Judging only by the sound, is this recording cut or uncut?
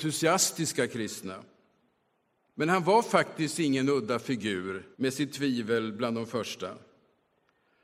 cut